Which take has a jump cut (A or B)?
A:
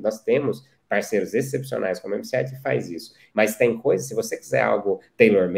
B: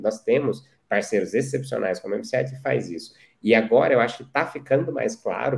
A